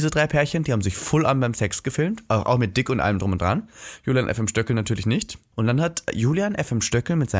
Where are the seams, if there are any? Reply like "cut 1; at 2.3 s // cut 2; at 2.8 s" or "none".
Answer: cut 1; at 5.5 s